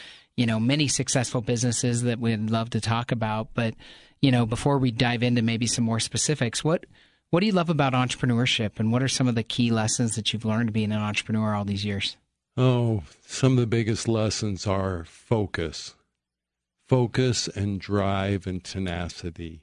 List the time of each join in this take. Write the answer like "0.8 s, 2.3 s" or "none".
none